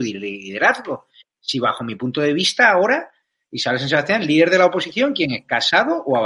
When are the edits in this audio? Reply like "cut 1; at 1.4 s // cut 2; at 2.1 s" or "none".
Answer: none